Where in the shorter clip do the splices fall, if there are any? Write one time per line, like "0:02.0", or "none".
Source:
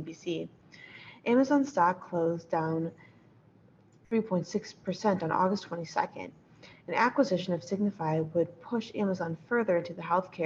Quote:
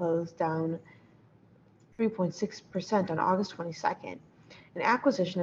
none